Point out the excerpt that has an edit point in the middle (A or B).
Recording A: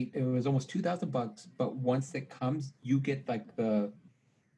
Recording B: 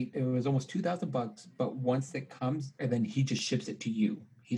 B